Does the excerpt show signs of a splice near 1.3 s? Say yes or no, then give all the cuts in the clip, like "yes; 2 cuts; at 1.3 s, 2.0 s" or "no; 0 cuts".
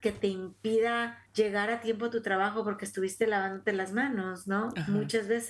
yes; 1 cut; at 1.3 s